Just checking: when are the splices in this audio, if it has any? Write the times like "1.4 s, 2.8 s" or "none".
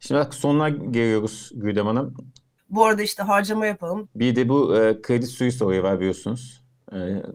2.6 s, 4.0 s